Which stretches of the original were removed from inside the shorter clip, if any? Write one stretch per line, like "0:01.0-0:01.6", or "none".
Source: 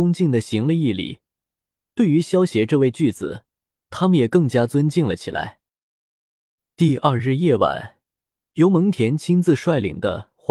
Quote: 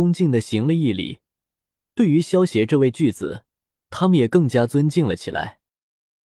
none